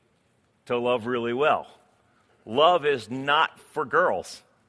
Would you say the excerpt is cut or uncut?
uncut